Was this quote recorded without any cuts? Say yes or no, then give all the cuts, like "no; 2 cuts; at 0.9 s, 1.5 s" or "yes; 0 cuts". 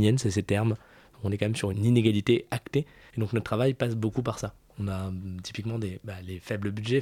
no; 3 cuts; at 1.7 s, 3.1 s, 4.7 s